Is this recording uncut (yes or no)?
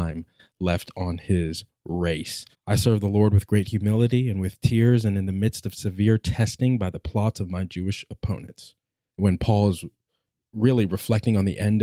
no